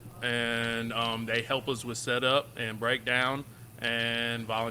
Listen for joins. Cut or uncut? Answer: uncut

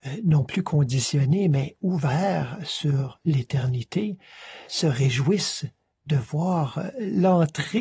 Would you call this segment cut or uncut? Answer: cut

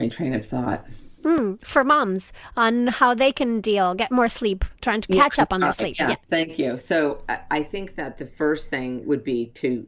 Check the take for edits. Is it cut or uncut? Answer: uncut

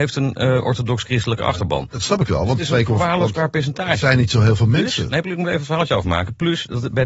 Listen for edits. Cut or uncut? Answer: uncut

